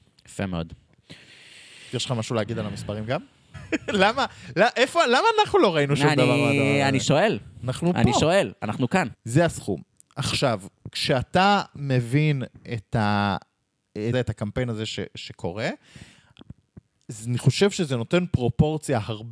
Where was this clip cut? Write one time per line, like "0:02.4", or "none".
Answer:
0:03.5
0:09.1
0:14.1